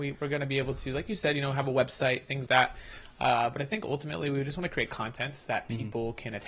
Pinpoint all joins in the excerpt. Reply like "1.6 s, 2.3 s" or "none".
2.5 s